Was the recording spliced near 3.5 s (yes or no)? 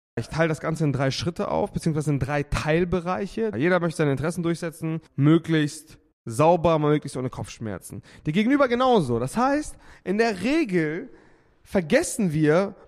yes